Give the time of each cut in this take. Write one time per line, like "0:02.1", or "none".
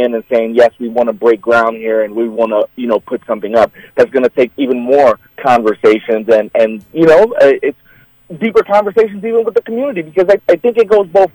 none